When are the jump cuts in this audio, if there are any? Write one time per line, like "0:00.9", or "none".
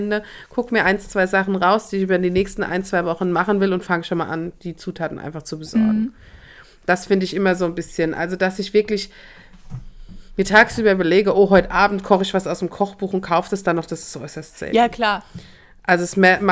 none